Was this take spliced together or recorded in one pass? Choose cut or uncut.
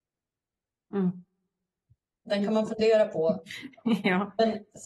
uncut